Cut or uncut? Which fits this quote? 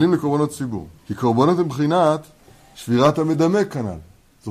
cut